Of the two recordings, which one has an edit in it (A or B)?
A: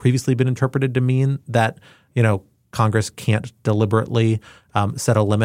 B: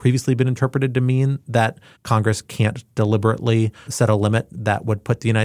B